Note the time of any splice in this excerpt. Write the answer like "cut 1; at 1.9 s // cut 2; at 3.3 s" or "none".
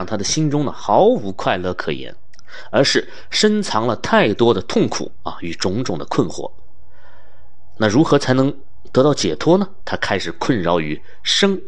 cut 1; at 9.8 s